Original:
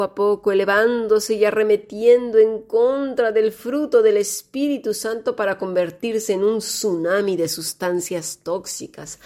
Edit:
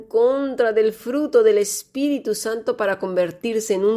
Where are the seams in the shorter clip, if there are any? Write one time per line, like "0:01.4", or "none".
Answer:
none